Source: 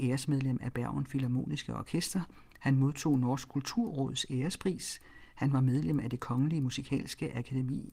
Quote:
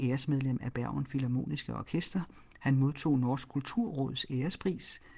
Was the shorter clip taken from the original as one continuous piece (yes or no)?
yes